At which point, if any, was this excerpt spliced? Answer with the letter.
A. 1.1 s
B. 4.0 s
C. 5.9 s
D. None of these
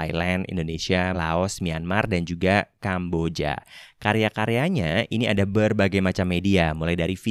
A